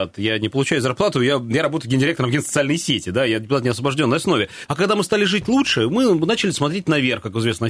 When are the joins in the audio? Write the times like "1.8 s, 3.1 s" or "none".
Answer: 4.7 s